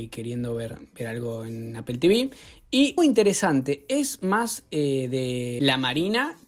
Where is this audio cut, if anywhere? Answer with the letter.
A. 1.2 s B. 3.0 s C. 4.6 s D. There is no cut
B